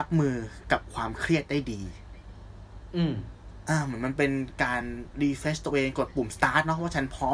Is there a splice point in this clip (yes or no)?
no